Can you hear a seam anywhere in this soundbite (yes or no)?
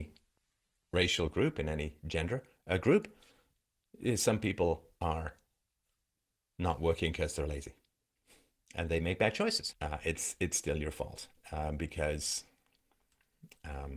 yes